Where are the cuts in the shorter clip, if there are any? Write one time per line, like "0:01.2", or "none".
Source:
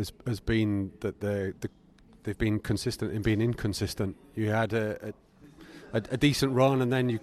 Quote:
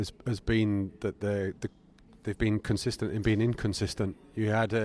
none